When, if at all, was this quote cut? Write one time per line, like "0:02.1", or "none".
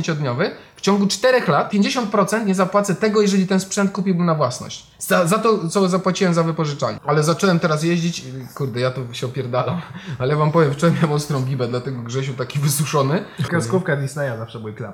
0:07.0
0:13.5